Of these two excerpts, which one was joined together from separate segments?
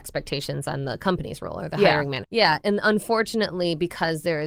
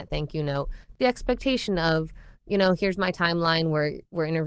first; 1 cut; at 2.2 s

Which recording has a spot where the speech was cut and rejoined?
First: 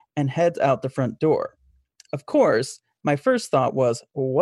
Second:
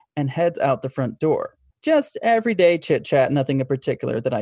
second; 1 cut; at 1.7 s

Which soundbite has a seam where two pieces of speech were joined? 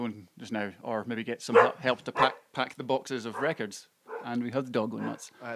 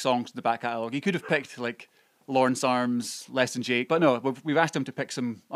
second; 1 cut; at 3.9 s

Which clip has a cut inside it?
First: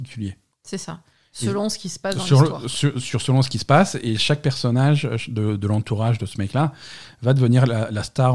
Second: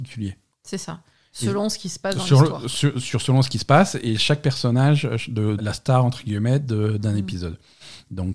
second; 1 cut; at 5.6 s

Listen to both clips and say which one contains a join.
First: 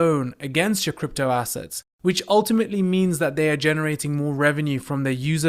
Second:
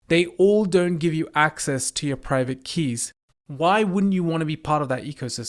second; 1 cut; at 3.3 s

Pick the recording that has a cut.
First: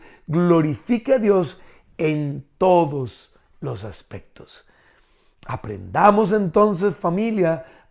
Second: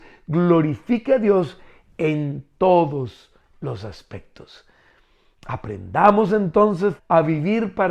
second; 1 cut; at 7.0 s

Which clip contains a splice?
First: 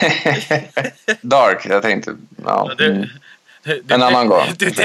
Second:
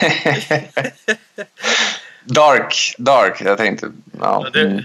first; 1 cut; at 1.2 s

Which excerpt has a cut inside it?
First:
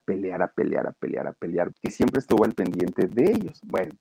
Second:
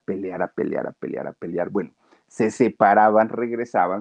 first; 2 cuts; at 1.7 s, 3.1 s

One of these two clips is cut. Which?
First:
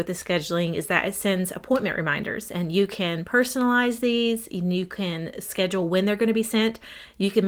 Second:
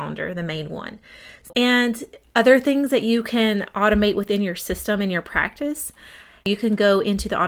second; 1 cut; at 1.5 s

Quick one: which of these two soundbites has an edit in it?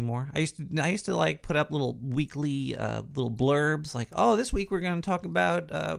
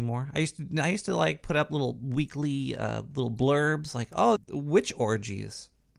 second; 1 cut; at 4.4 s

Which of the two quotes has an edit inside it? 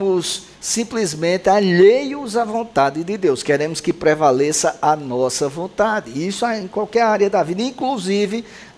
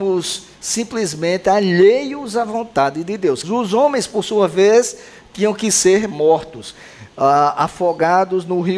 second; 1 cut; at 3.4 s

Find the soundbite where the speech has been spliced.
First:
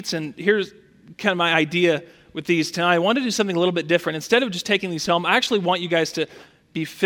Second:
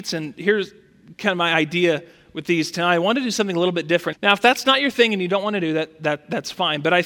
second; 1 cut; at 4.1 s

